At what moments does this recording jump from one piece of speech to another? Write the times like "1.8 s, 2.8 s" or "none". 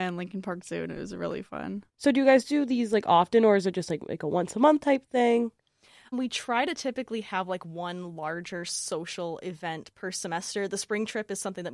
1.9 s, 6.1 s